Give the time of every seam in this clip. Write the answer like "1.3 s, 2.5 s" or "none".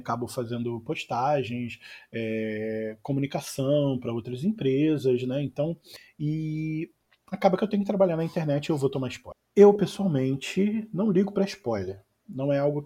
none